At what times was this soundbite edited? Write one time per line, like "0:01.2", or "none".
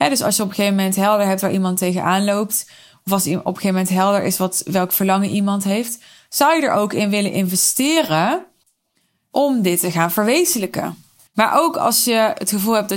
0:11.3